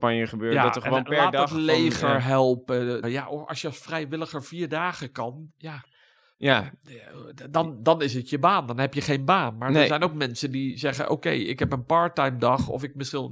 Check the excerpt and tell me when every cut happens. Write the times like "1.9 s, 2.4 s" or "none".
3.0 s